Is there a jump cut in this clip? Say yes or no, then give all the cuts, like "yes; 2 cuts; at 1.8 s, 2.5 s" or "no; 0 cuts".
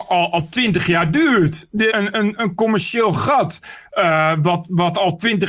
yes; 1 cut; at 1.9 s